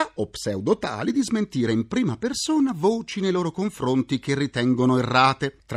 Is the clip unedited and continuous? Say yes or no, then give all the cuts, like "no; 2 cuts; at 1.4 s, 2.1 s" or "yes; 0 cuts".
yes; 0 cuts